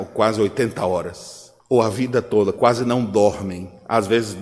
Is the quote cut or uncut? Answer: cut